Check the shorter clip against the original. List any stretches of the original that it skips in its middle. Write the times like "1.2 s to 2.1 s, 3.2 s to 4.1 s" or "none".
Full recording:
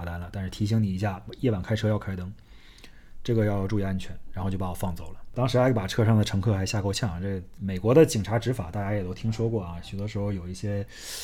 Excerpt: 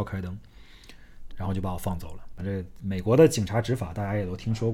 3.2 s to 4.2 s, 5.3 s to 7.2 s